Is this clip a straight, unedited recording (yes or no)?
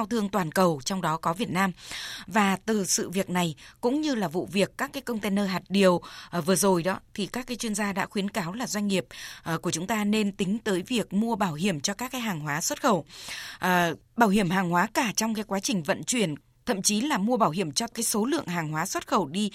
yes